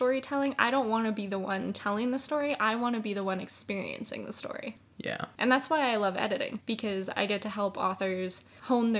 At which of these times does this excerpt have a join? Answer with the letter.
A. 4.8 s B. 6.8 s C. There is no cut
C